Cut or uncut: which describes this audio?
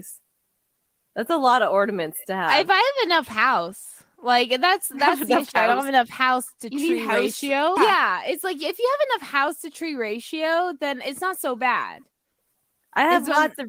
cut